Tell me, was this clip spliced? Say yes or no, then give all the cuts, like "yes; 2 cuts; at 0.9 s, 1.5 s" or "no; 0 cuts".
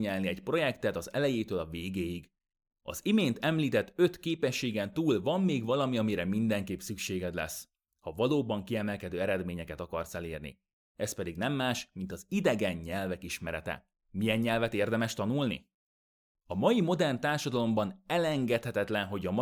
yes; 1 cut; at 14.0 s